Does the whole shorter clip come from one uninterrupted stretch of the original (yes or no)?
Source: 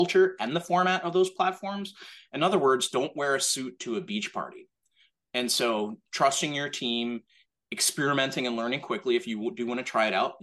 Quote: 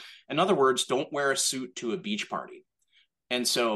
yes